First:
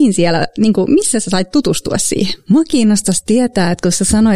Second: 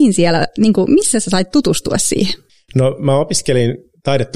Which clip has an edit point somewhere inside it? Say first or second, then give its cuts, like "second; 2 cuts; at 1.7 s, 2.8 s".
first; 1 cut; at 2.4 s